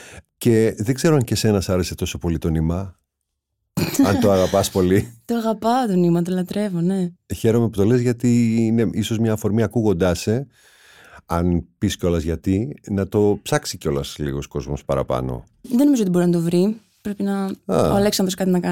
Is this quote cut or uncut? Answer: uncut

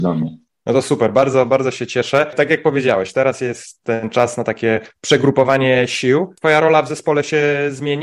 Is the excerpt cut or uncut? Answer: uncut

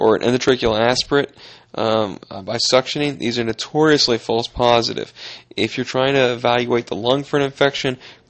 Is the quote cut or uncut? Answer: uncut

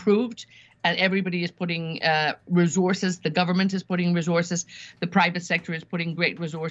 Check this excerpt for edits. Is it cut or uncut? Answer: uncut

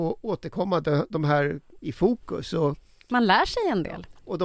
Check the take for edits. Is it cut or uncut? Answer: cut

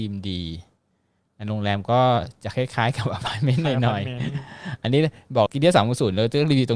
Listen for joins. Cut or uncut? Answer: cut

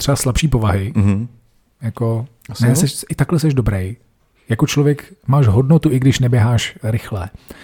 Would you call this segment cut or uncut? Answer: uncut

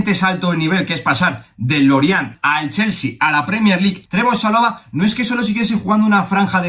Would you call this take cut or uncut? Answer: cut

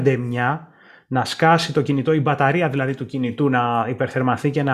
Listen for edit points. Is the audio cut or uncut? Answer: uncut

